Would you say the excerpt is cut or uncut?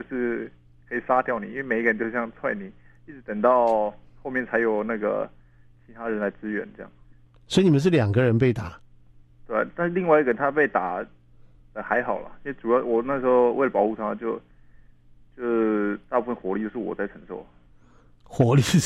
uncut